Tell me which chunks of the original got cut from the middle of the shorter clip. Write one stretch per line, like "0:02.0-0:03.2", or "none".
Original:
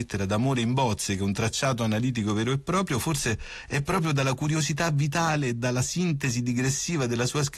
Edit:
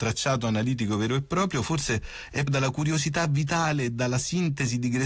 0:03.8-0:04.1